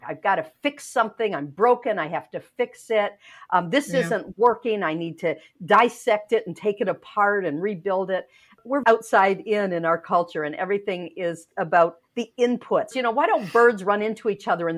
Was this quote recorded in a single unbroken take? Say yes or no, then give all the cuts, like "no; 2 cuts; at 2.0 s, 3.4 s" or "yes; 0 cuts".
no; 2 cuts; at 8.8 s, 12.9 s